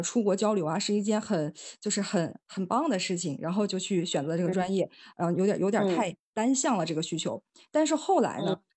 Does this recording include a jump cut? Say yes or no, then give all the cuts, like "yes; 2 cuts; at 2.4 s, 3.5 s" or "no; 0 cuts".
no; 0 cuts